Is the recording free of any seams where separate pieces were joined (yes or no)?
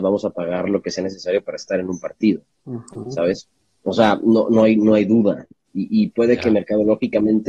yes